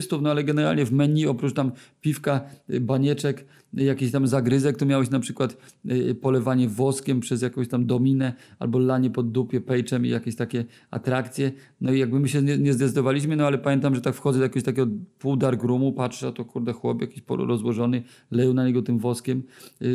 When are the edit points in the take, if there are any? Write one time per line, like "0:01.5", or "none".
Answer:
none

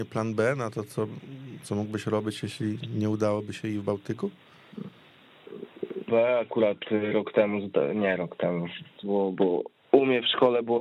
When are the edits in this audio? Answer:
0:06.1
0:09.0

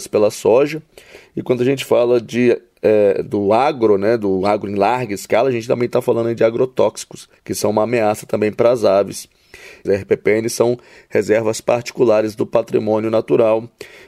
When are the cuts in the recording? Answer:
0:07.4
0:09.8

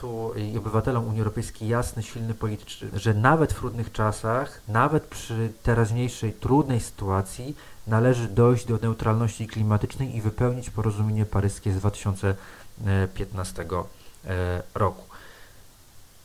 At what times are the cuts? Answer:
0:02.9

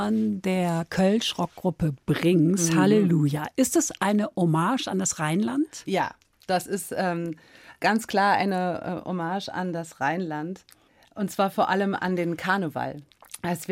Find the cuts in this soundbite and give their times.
none

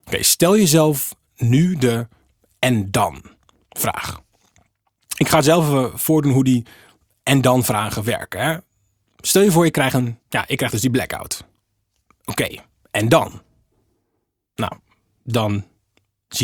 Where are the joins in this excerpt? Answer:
none

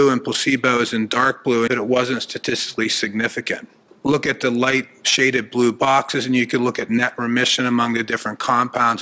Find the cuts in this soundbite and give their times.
0:01.7
0:03.9

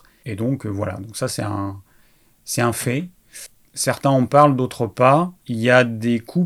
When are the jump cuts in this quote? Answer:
0:05.4

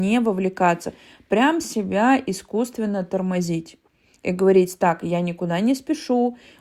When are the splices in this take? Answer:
none

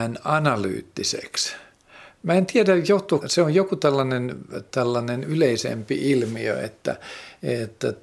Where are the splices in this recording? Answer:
0:03.2

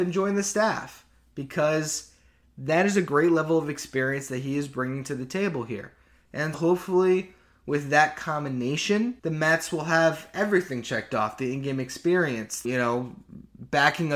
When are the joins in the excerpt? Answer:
0:06.5
0:09.2
0:12.6

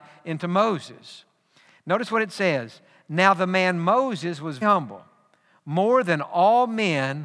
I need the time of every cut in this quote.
0:04.6

